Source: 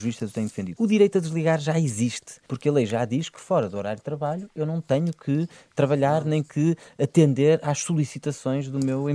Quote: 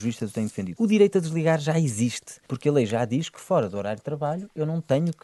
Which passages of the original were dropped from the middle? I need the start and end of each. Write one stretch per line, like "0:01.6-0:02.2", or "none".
none